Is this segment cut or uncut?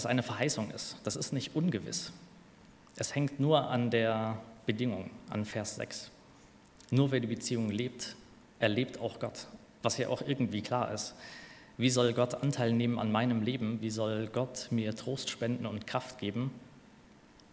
uncut